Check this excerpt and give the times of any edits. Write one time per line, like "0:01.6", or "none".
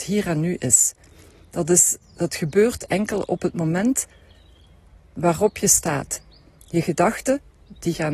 0:06.6

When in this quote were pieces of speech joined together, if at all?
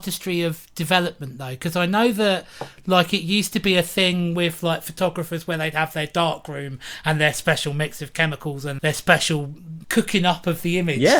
0:08.8
0:09.8

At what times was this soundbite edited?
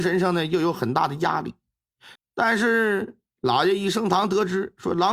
0:02.2

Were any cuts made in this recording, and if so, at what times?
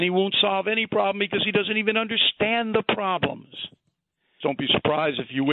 0:04.4

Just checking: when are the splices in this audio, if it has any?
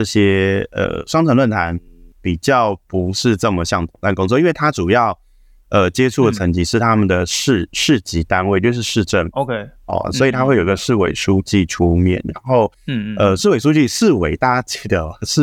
none

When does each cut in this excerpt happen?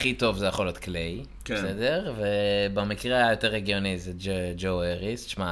none

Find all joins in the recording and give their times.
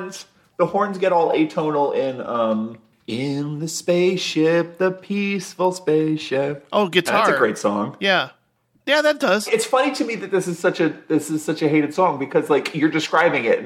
0:09.5

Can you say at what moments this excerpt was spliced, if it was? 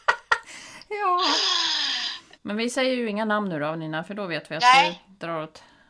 0:02.3

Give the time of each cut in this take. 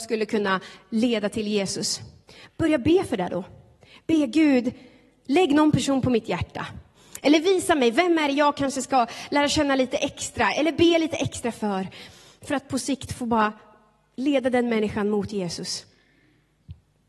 none

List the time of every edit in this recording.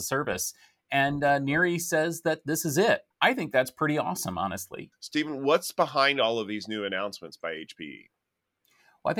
0:03.1
0:04.9

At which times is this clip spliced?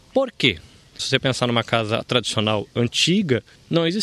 0:01.0

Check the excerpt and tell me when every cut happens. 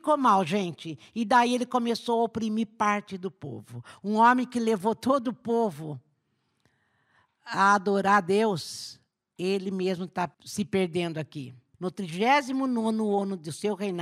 0:10.3
0:11.7

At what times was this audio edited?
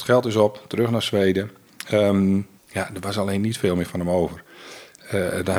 0:02.6

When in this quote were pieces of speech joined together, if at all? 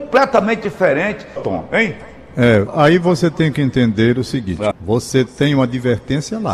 0:01.4
0:02.7
0:04.7

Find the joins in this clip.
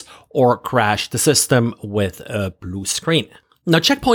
none

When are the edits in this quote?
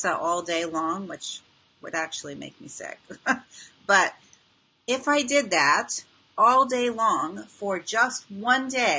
none

